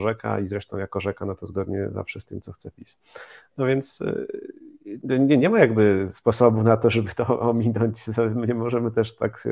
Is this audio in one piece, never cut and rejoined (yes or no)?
yes